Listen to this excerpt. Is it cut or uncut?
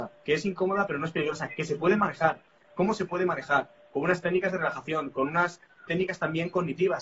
cut